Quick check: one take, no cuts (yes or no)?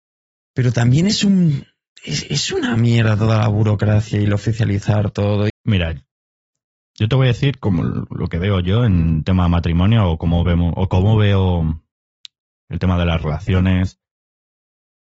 no